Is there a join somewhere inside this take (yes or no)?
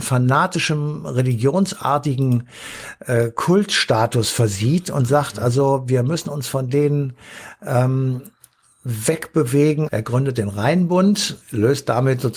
yes